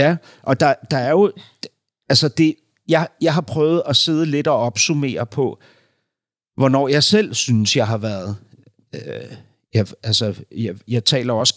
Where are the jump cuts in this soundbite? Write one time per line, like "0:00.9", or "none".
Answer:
none